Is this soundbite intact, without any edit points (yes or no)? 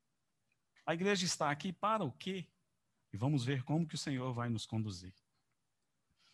no